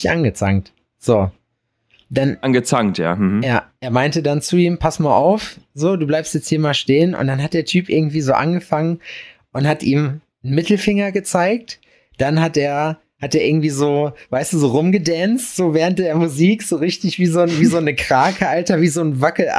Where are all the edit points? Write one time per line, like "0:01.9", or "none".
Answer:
none